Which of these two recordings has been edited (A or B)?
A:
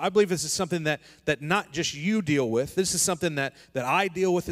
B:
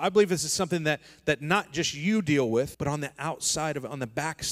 B